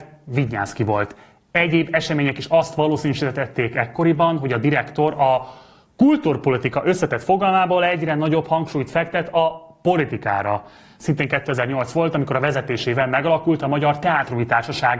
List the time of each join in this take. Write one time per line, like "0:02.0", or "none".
none